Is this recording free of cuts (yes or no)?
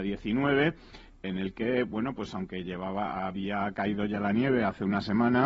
yes